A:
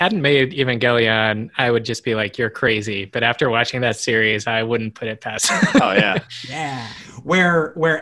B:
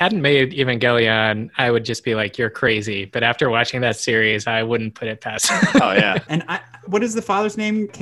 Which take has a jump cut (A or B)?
B